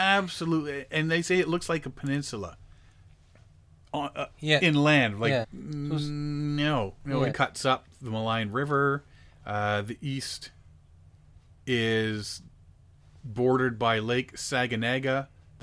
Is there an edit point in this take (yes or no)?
yes